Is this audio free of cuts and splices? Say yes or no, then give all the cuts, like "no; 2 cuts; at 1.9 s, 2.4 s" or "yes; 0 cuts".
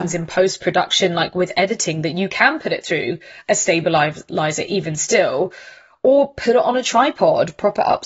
yes; 0 cuts